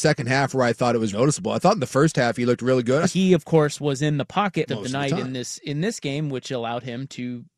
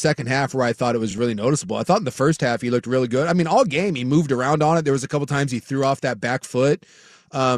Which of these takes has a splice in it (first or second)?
first